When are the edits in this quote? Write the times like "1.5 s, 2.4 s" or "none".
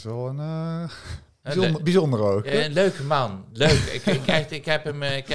none